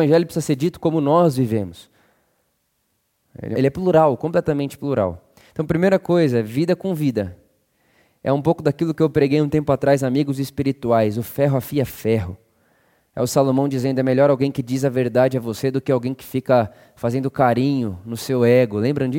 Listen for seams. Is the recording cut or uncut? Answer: cut